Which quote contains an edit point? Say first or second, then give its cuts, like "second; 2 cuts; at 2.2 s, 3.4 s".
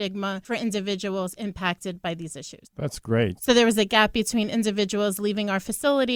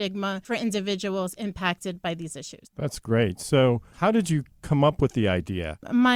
first; 1 cut; at 3.4 s